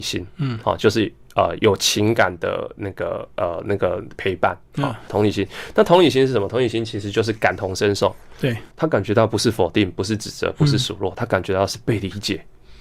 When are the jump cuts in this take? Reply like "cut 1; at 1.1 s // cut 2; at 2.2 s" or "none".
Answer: cut 1; at 1.6 s // cut 2; at 5.1 s // cut 3; at 8.7 s

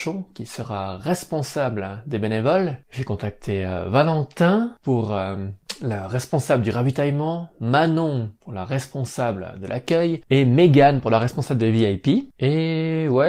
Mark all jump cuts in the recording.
none

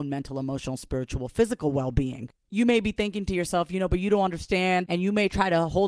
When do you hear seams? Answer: cut 1; at 4.9 s

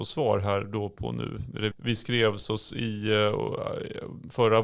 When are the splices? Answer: cut 1; at 1.7 s

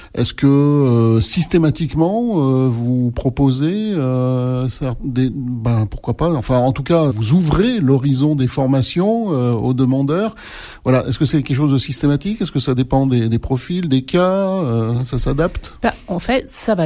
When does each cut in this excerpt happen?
cut 1; at 7.1 s

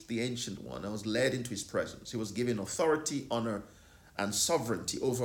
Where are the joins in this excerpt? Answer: none

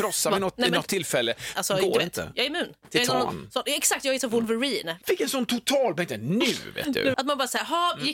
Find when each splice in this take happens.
cut 1; at 1.5 s // cut 2; at 5.0 s // cut 3; at 7.1 s

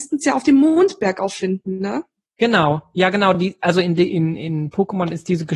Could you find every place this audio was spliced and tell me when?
none

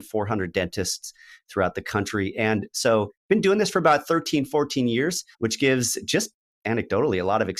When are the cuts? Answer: cut 1; at 5.3 s

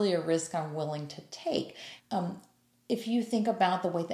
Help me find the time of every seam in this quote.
cut 1; at 2.0 s

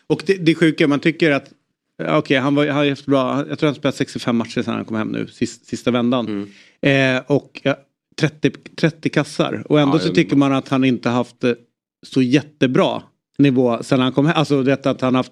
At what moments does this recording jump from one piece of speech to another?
none

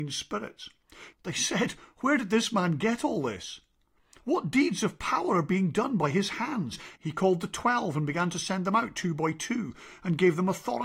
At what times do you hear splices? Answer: cut 1; at 1.1 s // cut 2; at 4.2 s // cut 3; at 7.0 s

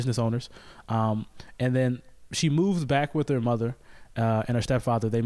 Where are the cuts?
none

